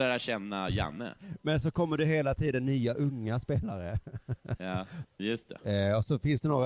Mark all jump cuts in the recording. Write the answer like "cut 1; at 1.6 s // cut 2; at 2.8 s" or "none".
cut 1; at 5.0 s